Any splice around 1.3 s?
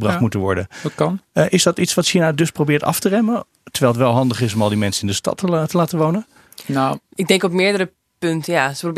no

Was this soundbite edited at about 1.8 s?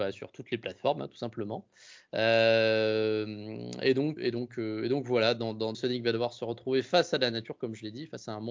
no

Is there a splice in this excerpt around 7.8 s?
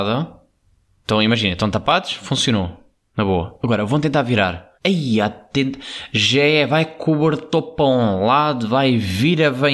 no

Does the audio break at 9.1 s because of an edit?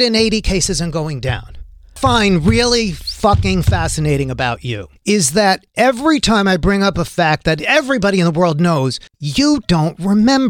yes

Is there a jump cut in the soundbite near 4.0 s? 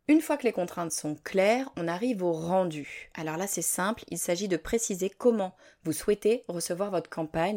no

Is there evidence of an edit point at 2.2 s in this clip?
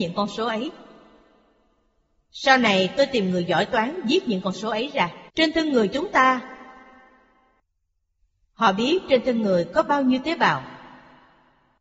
no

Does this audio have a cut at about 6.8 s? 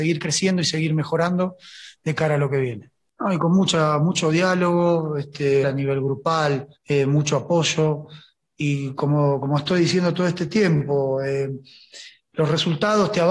yes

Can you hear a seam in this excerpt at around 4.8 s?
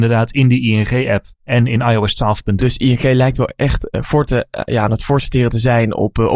no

